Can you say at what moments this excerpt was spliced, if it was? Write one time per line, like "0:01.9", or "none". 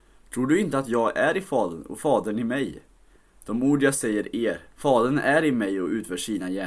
0:04.8